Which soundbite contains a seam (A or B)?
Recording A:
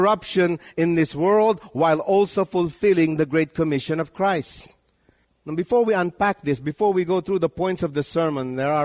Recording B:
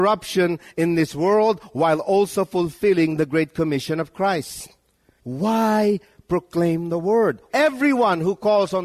B